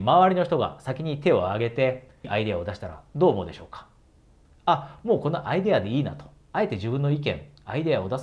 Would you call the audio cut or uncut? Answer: cut